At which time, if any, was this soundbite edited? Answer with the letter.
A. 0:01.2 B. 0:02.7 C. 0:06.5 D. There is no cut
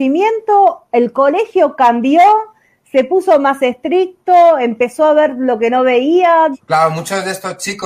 C